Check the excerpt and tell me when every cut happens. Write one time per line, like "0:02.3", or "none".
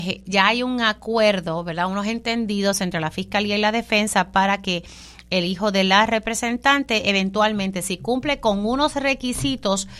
none